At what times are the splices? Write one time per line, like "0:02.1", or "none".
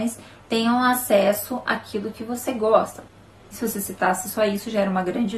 0:03.4